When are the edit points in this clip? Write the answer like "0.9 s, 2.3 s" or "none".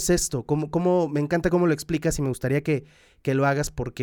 none